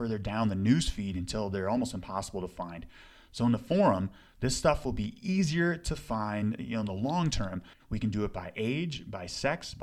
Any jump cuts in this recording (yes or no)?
yes